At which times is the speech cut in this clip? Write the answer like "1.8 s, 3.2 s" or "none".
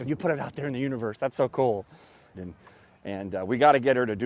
2.3 s